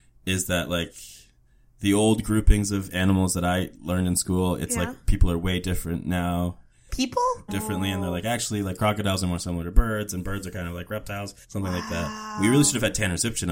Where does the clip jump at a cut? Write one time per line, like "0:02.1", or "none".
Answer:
0:07.5
0:11.4